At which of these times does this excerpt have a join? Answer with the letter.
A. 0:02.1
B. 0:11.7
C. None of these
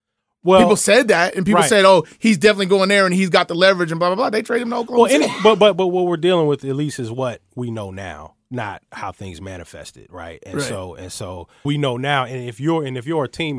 B